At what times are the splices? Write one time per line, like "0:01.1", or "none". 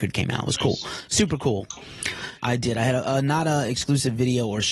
0:02.4